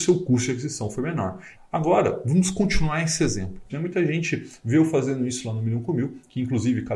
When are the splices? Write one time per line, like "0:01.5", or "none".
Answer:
0:01.6
0:03.7